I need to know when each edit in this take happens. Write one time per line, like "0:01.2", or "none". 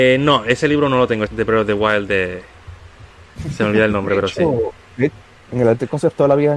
0:01.3